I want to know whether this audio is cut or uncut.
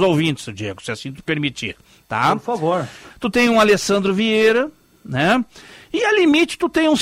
cut